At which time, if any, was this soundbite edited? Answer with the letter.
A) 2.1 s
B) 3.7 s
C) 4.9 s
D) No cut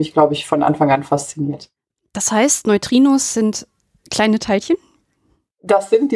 D